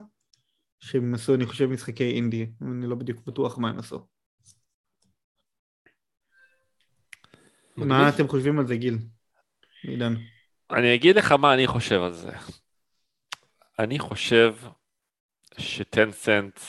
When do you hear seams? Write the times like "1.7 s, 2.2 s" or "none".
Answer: none